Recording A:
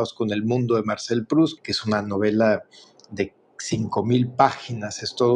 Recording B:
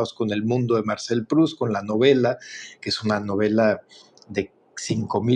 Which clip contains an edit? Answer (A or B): A